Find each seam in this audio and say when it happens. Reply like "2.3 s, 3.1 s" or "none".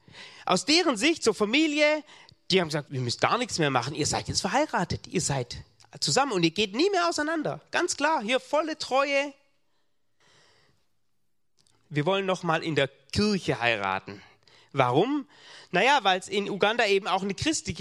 2.8 s, 11.7 s